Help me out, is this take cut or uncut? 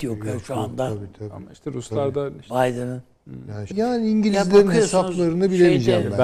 cut